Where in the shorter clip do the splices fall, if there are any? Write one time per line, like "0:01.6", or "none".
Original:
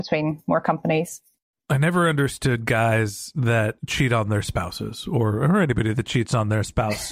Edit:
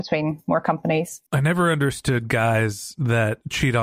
0:01.3

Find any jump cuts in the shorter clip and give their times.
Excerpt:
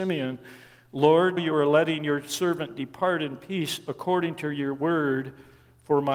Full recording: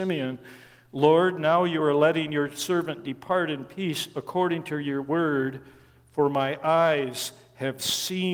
0:01.4

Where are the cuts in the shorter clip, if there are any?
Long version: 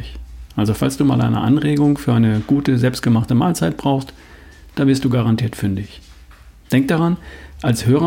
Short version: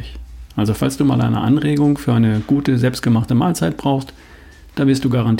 none

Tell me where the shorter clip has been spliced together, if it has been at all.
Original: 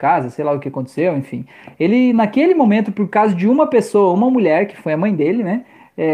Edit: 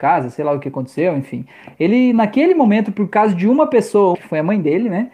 0:04.1

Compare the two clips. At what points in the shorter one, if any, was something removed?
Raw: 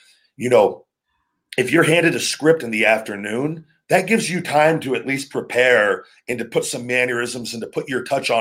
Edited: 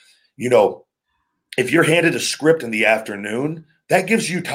none

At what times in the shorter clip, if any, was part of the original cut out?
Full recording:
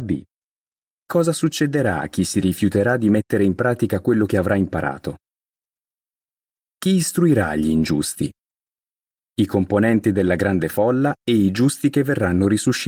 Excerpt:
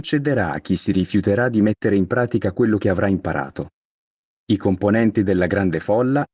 0:04.3

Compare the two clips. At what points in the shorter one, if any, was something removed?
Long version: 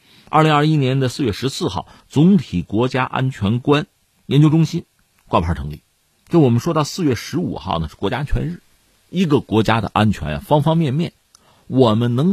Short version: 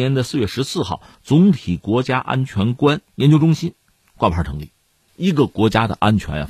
0:03.1
0:05.1

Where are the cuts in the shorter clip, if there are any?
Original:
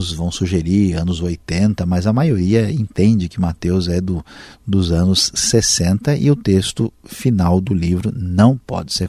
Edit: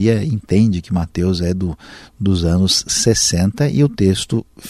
none

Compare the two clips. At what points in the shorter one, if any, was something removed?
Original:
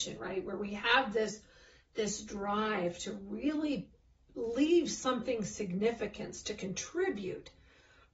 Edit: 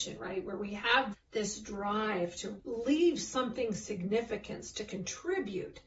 0:01.1
0:02.6

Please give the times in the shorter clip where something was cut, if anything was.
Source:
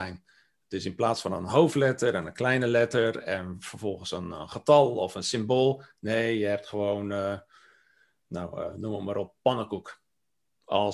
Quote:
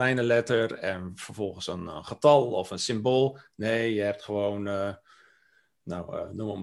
none

